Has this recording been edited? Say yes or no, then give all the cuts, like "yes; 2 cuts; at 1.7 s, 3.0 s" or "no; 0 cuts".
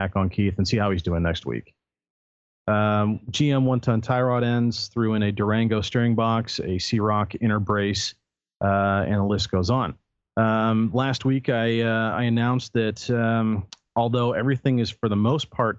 yes; 1 cut; at 2.6 s